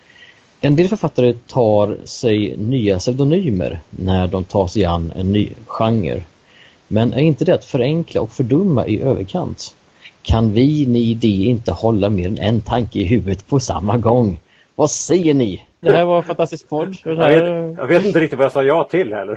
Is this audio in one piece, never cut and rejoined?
no; 1 cut; at 15.8 s

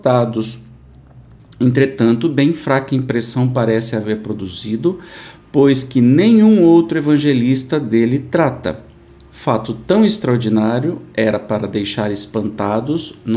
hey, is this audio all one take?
yes; 0 cuts

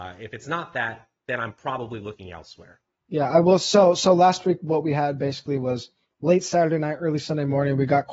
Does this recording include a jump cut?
no; 0 cuts

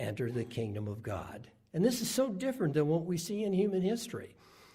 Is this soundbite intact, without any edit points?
yes; 0 cuts

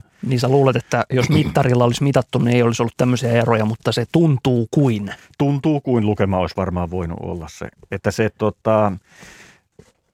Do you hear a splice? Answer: no; 0 cuts

